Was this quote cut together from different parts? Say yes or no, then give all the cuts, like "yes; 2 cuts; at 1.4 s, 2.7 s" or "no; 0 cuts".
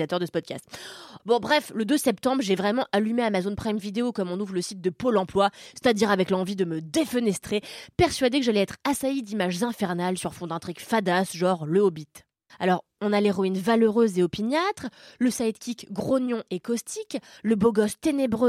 yes; 2 cuts; at 1.2 s, 12.5 s